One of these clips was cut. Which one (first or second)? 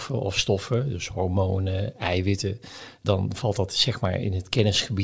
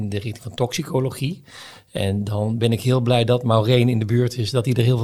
first